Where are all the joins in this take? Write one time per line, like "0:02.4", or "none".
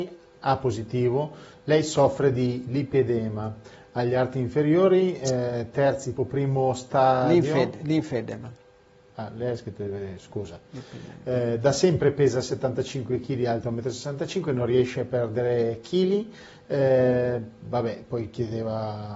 0:06.2